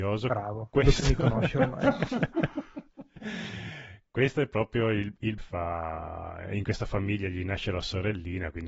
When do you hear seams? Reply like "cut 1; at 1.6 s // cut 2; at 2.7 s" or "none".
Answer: cut 1; at 5.4 s

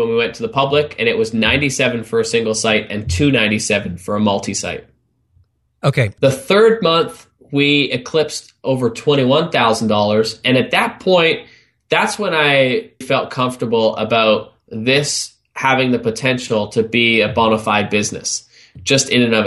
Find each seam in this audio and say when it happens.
cut 1; at 6.2 s // cut 2; at 13.0 s

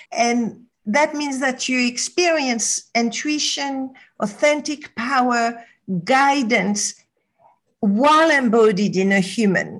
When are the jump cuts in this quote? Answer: none

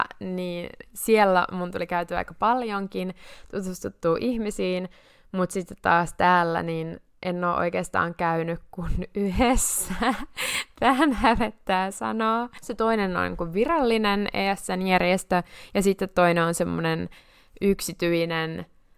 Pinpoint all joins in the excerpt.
cut 1; at 12.6 s

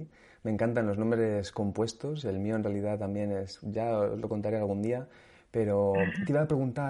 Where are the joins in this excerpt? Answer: none

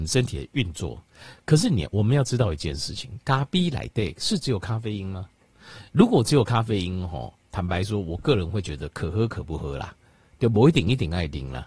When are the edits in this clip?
none

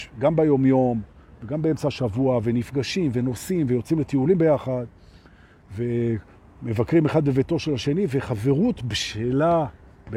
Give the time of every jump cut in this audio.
none

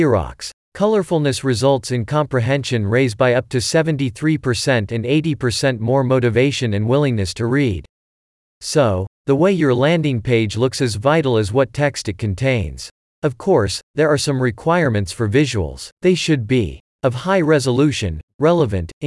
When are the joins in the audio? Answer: cut 1; at 13.0 s // cut 2; at 15.9 s

